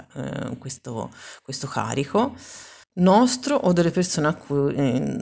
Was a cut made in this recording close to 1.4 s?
no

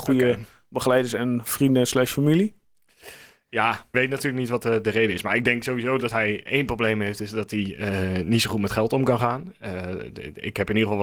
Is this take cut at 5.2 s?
no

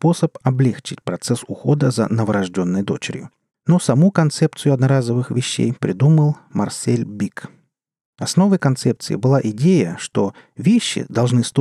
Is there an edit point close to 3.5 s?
yes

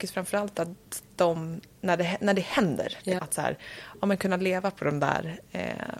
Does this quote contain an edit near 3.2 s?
yes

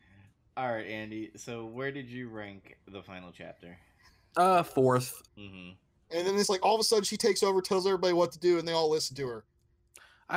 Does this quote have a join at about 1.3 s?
no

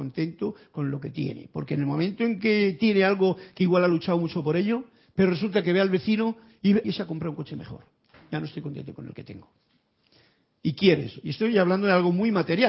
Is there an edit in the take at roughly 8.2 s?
no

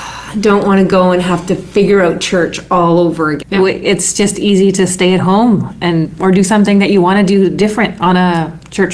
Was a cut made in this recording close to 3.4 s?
yes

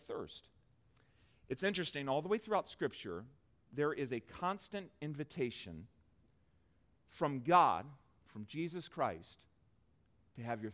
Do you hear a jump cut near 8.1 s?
no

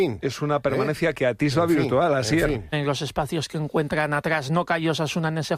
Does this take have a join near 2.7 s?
yes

